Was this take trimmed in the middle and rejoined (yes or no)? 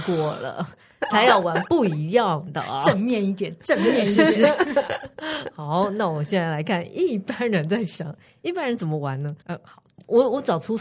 yes